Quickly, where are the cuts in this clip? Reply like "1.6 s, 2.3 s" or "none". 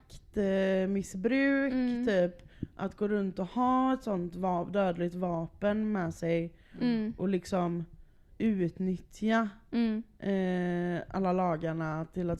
none